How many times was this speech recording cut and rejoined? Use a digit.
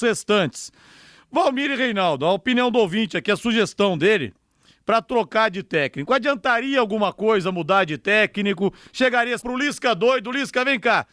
1